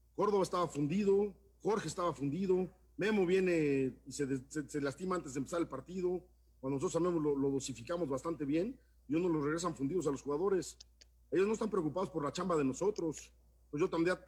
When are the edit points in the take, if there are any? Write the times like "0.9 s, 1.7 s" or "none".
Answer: none